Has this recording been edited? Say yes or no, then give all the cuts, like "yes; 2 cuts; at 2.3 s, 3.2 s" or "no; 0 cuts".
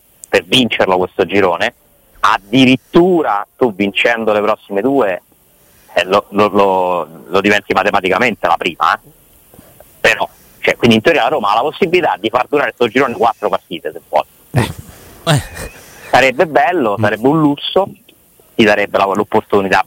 yes; 1 cut; at 15.3 s